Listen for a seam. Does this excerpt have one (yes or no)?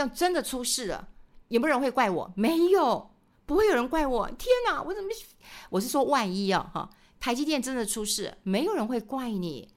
no